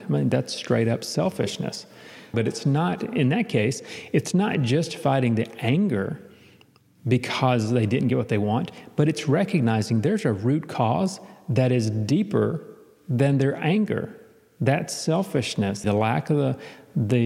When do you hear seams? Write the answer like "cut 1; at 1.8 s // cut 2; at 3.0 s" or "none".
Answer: cut 1; at 2.3 s // cut 2; at 15.8 s